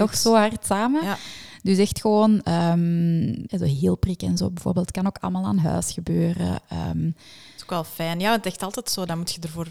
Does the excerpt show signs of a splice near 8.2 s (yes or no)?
no